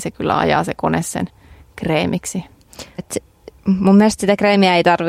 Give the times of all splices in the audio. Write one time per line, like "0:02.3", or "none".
0:03.0